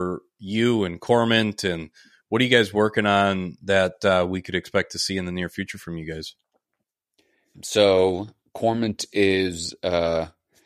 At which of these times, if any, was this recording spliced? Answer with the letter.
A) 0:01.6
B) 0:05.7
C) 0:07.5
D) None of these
C